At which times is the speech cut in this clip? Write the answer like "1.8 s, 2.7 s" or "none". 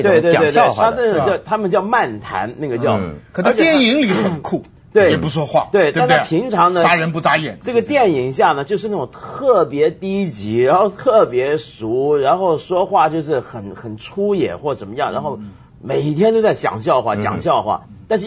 none